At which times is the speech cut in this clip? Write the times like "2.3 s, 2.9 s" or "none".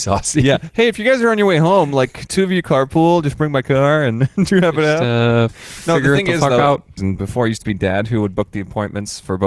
7.0 s